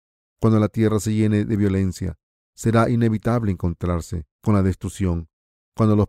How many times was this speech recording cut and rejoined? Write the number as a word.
two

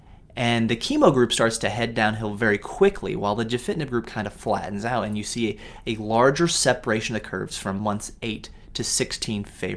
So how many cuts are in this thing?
zero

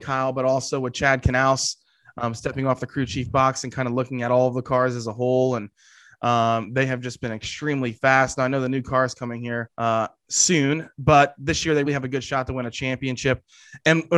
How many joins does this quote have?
two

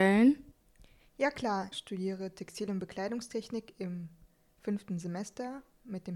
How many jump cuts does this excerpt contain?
one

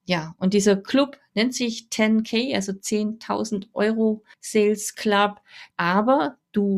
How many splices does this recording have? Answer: two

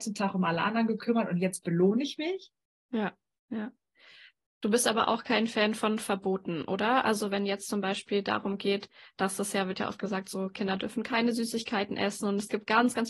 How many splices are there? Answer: one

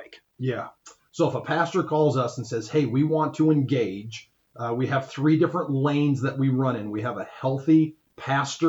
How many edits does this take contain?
one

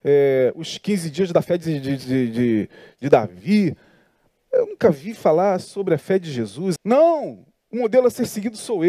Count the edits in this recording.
one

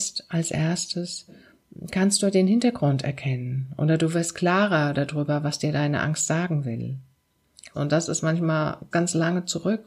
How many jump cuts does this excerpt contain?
two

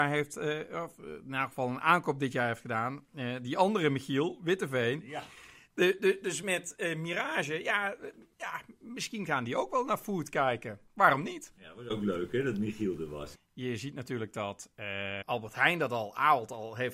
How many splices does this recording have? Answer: three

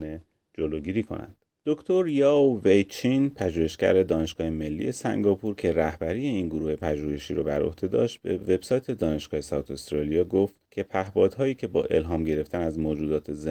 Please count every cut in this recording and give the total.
two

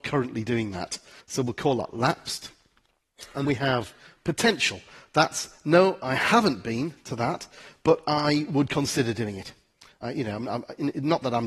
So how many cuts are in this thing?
two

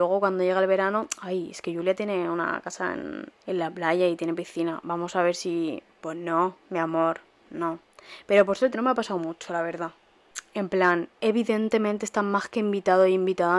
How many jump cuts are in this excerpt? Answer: two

